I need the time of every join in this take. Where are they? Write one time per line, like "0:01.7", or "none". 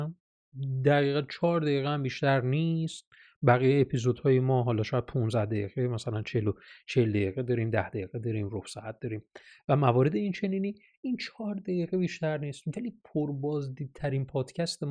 none

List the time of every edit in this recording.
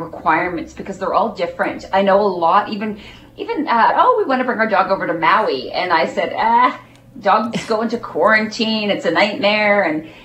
0:03.9

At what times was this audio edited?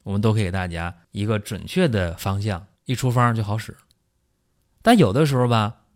0:01.0
0:02.8

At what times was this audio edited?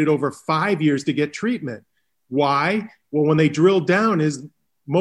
none

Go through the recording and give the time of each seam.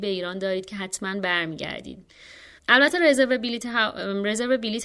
0:02.6

